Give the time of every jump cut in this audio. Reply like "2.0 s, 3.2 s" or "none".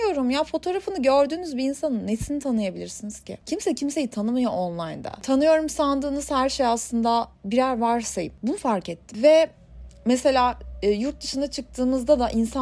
none